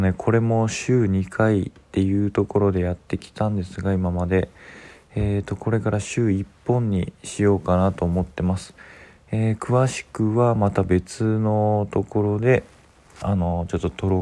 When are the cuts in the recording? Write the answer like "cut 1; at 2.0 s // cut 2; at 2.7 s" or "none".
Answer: none